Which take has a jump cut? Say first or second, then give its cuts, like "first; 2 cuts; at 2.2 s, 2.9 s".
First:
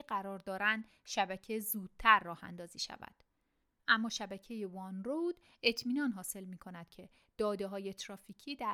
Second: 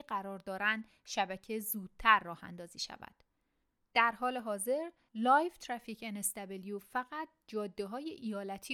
first; 1 cut; at 3.8 s